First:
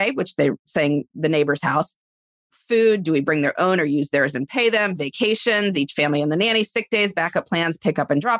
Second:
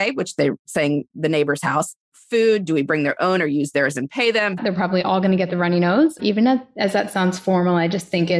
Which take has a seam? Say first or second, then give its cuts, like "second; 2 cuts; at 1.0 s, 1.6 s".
second; 3 cuts; at 2.0 s, 4.6 s, 6.2 s